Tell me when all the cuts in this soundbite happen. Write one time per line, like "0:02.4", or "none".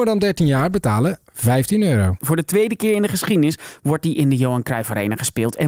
0:02.2